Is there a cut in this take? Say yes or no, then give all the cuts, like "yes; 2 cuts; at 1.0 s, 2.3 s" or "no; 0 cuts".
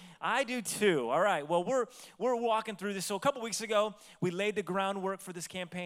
no; 0 cuts